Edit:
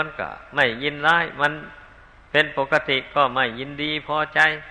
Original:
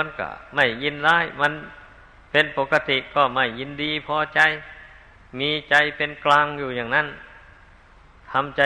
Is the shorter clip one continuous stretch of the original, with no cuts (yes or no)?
yes